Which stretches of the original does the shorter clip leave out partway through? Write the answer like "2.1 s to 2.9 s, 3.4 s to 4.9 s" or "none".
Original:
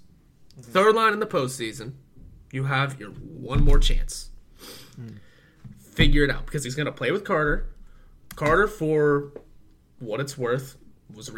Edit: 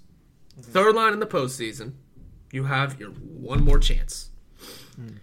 none